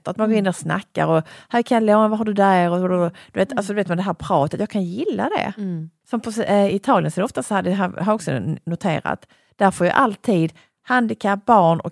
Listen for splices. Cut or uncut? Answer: uncut